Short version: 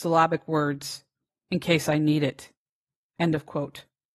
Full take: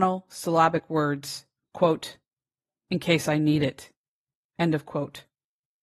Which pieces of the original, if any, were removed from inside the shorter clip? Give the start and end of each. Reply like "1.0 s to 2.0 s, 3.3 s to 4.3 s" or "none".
1.7 s to 2.7 s